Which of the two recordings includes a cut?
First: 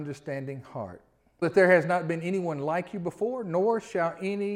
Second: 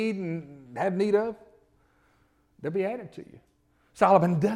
first; 1 cut; at 1.4 s

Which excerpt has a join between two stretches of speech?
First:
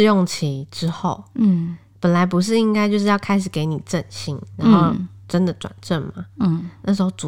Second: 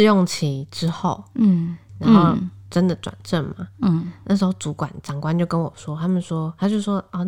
second; 1 cut; at 1.9 s

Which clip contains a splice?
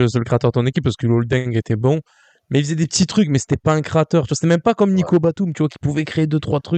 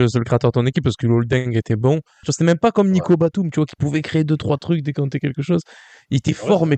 second; 1 cut; at 2.2 s

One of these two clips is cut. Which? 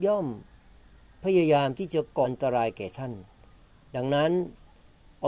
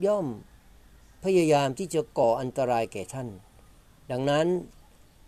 first; 1 cut; at 2.2 s

